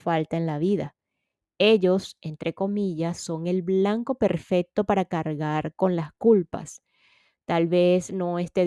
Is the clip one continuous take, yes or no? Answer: yes